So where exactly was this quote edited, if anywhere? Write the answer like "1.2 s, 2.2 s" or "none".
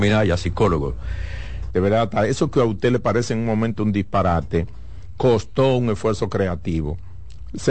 1.7 s